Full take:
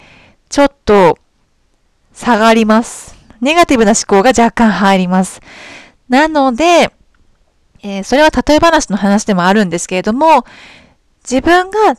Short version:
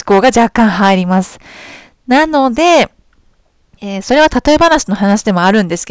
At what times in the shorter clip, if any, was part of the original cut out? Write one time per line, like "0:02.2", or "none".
none